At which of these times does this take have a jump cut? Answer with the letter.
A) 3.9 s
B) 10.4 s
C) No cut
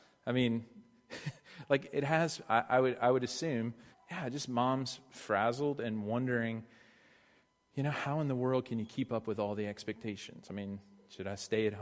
A